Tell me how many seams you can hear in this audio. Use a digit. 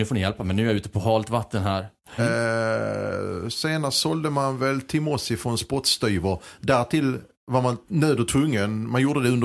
2